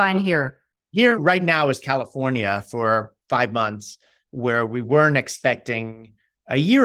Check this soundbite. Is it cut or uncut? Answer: uncut